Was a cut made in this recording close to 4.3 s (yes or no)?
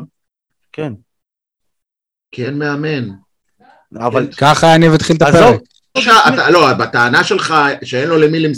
yes